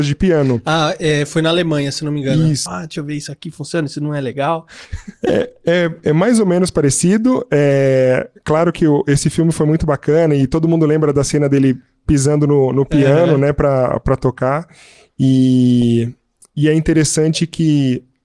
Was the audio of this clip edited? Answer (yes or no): yes